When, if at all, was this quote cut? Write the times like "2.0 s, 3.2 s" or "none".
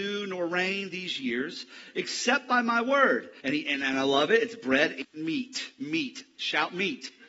3.4 s